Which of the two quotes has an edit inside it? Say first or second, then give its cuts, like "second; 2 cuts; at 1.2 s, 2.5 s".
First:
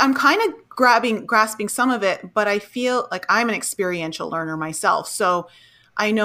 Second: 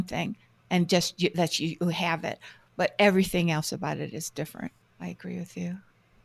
second; 1 cut; at 4.8 s